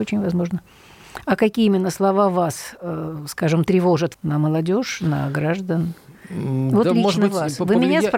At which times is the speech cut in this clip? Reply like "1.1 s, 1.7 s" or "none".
4.1 s

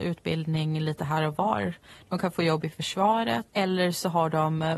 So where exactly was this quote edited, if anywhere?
3.5 s

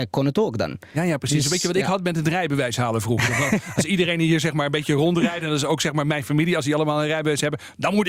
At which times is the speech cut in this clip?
none

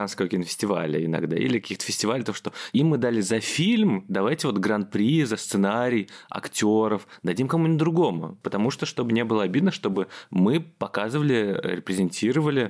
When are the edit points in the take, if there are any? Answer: none

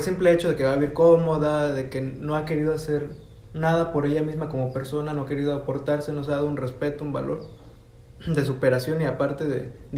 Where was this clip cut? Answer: none

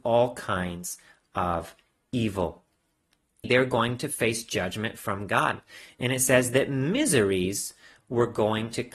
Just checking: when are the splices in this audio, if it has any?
3.4 s

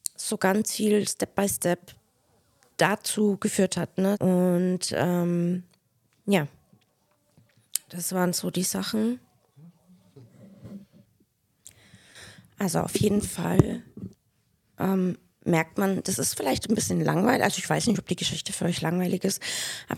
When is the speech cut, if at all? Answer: 4.1 s

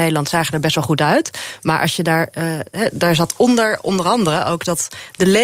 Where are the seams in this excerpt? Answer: none

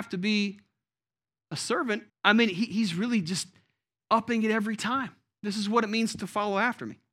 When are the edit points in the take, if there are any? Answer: 2.1 s

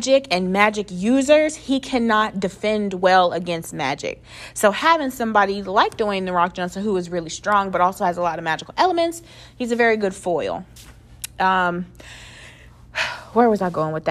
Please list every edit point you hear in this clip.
none

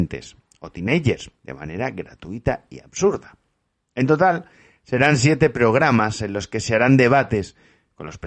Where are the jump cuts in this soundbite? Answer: 1.4 s

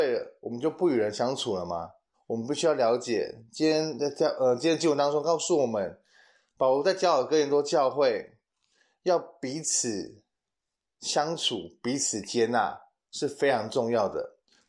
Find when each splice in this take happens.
2.1 s

